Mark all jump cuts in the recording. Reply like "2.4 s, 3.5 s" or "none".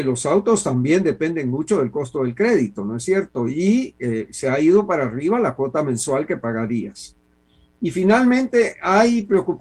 none

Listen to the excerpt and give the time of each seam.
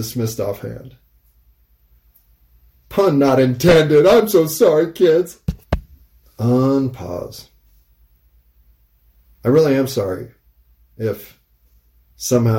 2.7 s

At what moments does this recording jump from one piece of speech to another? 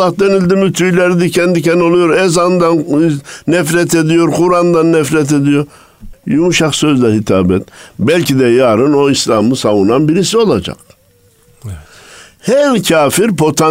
6.1 s

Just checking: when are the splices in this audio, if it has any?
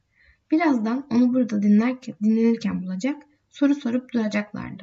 none

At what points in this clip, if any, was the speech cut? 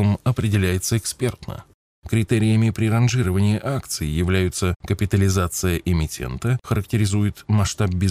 1.9 s

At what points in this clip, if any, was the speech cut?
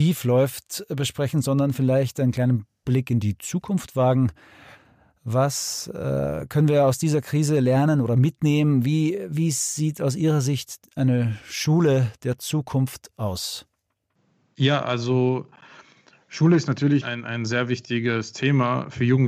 17.0 s

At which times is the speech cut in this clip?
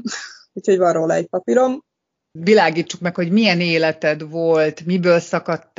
2.4 s

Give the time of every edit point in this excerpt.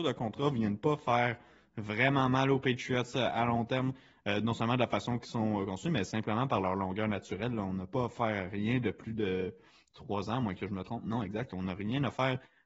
none

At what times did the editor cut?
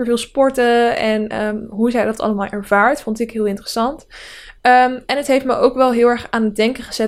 none

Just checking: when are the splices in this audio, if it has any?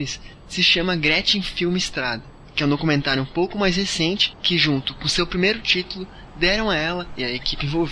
none

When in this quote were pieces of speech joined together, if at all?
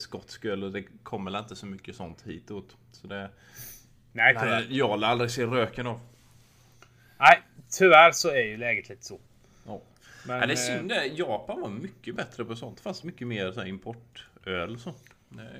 13.0 s

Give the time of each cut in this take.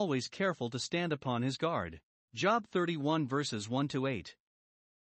2.2 s

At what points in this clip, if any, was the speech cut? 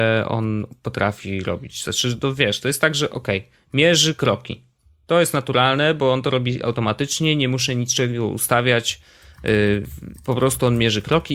none

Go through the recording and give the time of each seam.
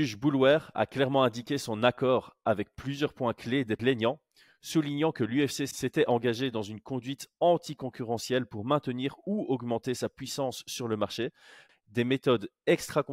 11.7 s

